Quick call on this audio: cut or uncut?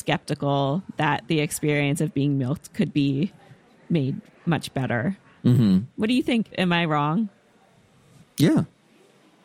uncut